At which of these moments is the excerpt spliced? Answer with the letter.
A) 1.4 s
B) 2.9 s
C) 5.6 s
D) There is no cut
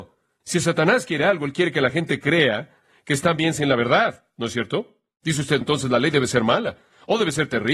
C